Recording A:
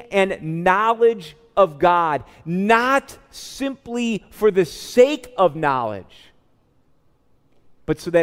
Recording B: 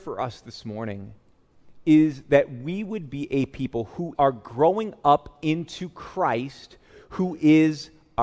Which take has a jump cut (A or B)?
B